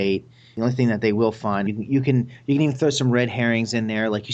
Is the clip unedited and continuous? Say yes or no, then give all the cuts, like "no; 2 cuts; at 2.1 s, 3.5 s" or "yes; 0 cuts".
no; 1 cut; at 1.7 s